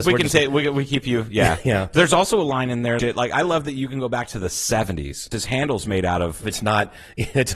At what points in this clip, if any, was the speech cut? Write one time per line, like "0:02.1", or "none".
0:03.0
0:05.3
0:06.4